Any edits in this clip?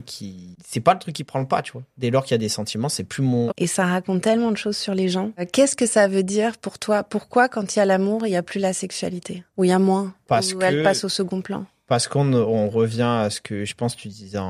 yes; 1 cut; at 3.5 s

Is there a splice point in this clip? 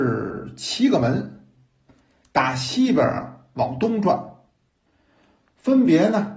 no; 0 cuts

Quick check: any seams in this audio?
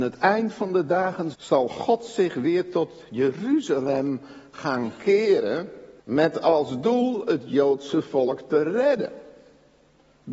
yes; 2 cuts; at 1.3 s, 6.0 s

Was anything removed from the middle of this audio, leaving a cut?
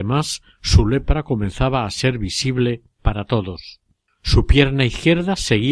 yes; 1 cut; at 4.1 s

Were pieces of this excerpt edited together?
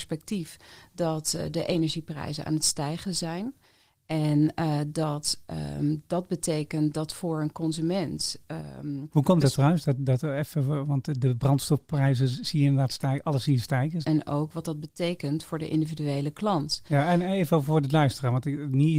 yes; 1 cut; at 14.0 s

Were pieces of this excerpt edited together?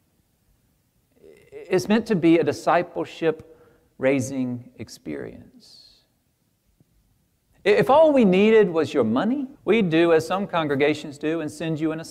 yes; 1 cut; at 9.5 s

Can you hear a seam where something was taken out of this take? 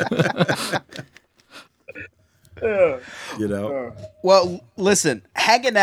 no; 0 cuts

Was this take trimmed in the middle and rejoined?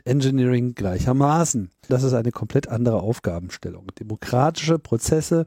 yes; 1 cut; at 1.9 s

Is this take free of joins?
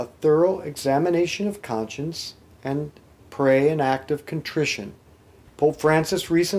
no; 1 cut; at 5.4 s

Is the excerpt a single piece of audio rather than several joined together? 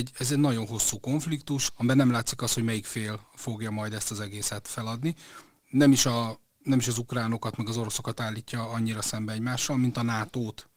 no; 1 cut; at 1.7 s

